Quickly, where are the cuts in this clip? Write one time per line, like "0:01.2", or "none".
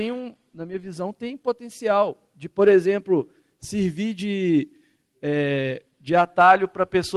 none